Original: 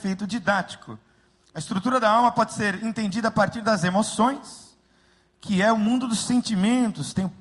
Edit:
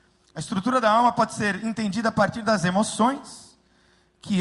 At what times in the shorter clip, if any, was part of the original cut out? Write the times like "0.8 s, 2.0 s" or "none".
none